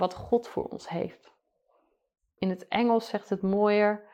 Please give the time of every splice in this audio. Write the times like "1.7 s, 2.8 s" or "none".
2.4 s